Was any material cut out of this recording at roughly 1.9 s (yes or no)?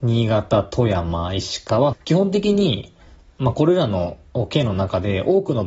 yes